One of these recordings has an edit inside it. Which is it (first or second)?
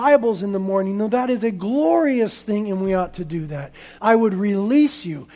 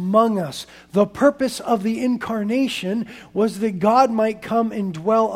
first